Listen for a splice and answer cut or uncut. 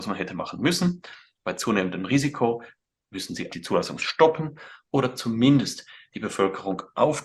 cut